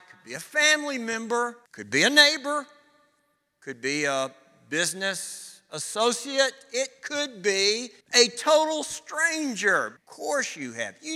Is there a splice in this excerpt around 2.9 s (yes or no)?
no